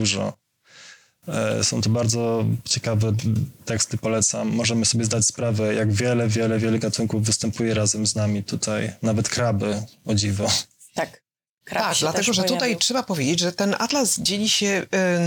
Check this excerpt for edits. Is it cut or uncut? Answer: uncut